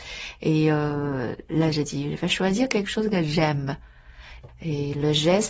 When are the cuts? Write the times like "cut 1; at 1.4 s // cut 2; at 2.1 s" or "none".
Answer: cut 1; at 4.5 s